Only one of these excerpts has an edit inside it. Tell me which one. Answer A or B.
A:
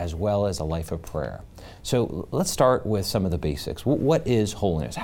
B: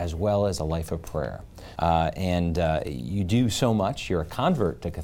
B